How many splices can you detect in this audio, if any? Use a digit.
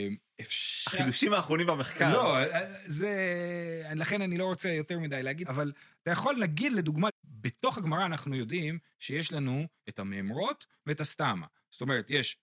2